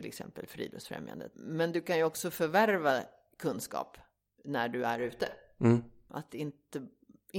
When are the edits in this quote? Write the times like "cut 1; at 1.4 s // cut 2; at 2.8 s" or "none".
cut 1; at 1.3 s // cut 2; at 6.1 s